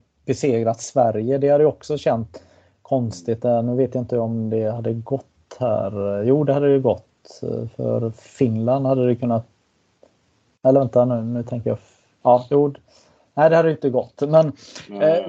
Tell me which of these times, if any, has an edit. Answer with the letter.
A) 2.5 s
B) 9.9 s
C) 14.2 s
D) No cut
D